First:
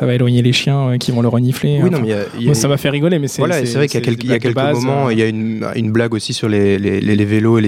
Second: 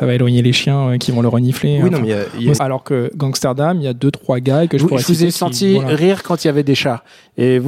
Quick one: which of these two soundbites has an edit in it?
second; 1 cut; at 2.6 s

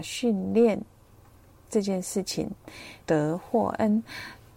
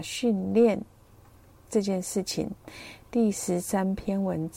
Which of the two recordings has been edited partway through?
first; 1 cut; at 3.0 s

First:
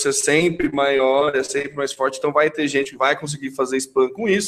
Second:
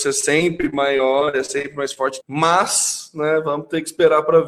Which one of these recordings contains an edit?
second; 1 cut; at 2.2 s

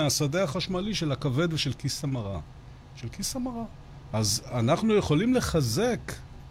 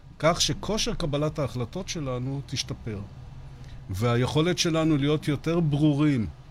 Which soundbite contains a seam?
first; 1 cut; at 4.1 s

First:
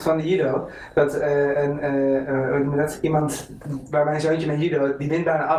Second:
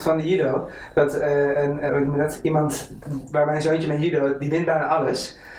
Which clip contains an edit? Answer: second; 1 cut; at 1.9 s

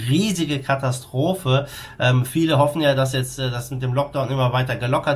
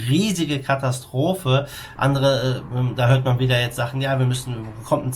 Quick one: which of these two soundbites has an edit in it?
second; 1 cut; at 2.0 s

